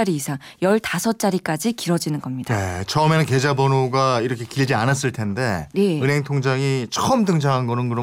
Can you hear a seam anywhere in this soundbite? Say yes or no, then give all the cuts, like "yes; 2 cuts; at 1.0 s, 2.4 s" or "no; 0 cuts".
no; 0 cuts